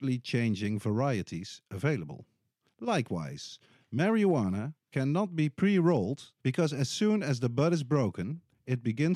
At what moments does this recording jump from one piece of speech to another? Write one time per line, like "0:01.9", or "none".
0:02.7
0:06.4

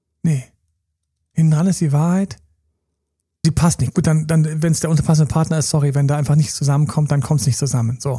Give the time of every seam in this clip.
0:03.4

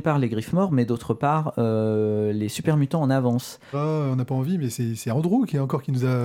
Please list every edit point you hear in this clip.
0:03.7

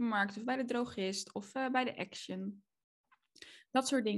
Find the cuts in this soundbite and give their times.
none

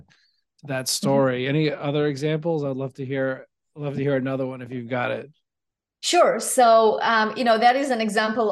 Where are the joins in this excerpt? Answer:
none

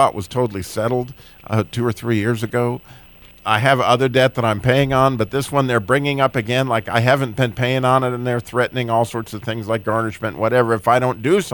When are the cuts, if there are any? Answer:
none

